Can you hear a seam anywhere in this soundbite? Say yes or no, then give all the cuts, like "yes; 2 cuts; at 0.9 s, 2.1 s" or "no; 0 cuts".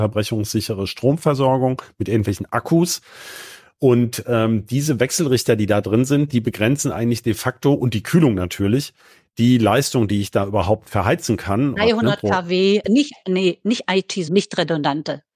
yes; 3 cuts; at 11.8 s, 12.8 s, 14.3 s